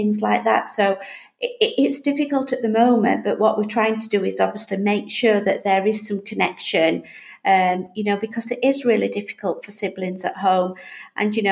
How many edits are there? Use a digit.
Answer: 0